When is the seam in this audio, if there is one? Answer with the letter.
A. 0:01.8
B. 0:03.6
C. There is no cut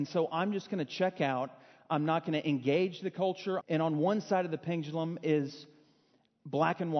B